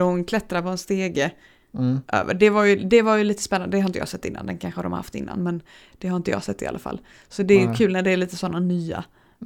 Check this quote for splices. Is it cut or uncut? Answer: uncut